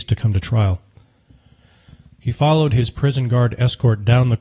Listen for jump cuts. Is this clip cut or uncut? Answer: uncut